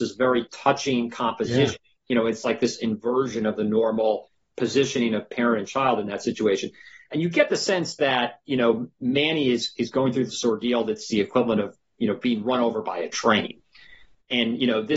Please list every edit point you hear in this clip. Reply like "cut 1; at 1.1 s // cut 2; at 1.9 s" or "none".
cut 1; at 2.0 s